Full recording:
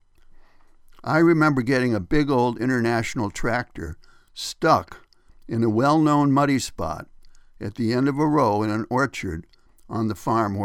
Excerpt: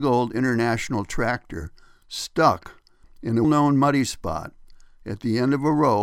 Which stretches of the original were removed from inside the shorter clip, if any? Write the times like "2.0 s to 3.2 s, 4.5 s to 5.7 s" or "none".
5.7 s to 6.0 s